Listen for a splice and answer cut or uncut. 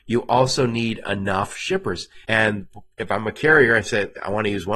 cut